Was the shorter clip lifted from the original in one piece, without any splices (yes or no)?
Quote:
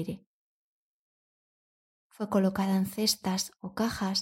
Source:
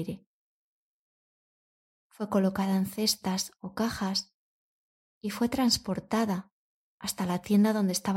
yes